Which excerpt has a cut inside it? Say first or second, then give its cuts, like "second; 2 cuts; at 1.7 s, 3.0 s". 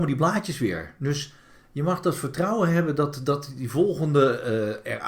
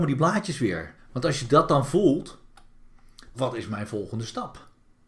second; 2 cuts; at 1.0 s, 3.3 s